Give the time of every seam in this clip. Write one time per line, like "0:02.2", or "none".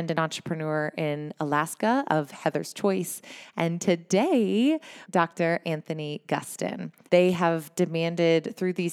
0:05.1
0:07.1